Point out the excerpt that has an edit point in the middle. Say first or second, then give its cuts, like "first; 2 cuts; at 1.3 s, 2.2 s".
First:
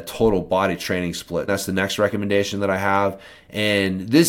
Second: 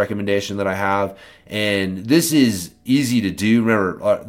first; 1 cut; at 1.5 s